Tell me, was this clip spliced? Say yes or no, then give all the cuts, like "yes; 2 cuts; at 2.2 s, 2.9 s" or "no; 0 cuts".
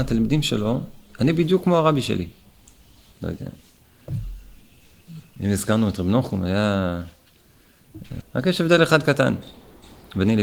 yes; 2 cuts; at 3.1 s, 8.2 s